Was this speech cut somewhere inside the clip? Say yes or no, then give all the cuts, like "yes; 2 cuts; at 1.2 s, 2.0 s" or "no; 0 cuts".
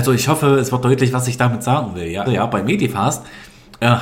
yes; 1 cut; at 2.3 s